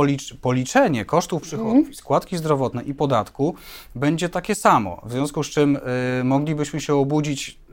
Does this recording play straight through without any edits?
yes; 0 cuts

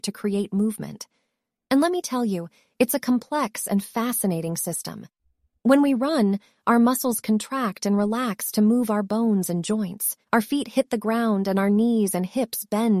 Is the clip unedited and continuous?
no; 2 cuts; at 5.5 s, 10.2 s

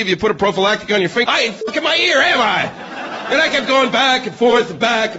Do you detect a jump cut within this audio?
yes; 1 cut; at 1.2 s

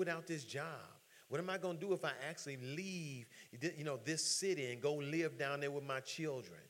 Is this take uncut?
no; 1 cut; at 1.2 s

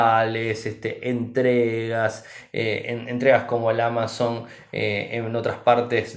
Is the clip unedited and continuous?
yes; 0 cuts

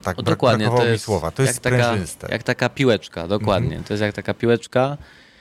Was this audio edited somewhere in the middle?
no; 0 cuts

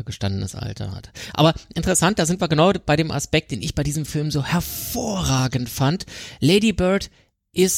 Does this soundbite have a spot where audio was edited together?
no; 0 cuts

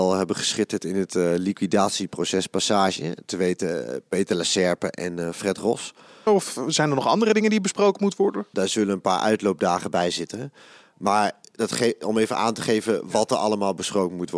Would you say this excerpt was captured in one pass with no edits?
no; 2 cuts; at 6.3 s, 8.5 s

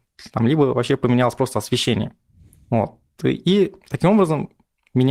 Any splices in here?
no; 0 cuts

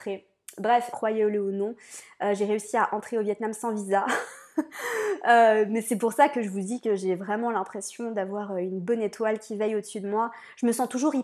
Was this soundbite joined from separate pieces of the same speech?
yes; 1 cut; at 0.9 s

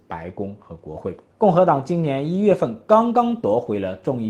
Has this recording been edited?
yes; 1 cut; at 1.3 s

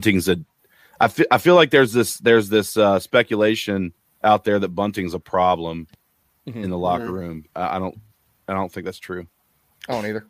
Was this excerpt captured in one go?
no; 1 cut; at 7.5 s

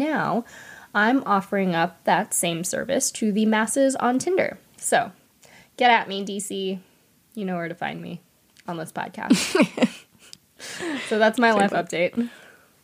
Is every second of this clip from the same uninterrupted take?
yes; 0 cuts

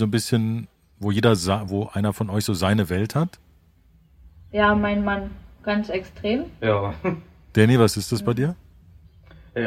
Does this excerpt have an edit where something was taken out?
yes; 1 cut; at 1.7 s

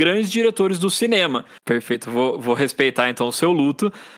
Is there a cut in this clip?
yes; 1 cut; at 1.6 s

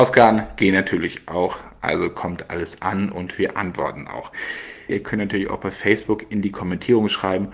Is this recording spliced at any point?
yes; 1 cut; at 4.9 s

